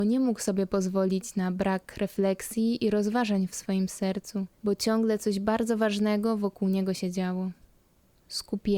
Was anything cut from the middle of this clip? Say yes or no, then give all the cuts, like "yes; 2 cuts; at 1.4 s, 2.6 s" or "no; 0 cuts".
yes; 1 cut; at 4.6 s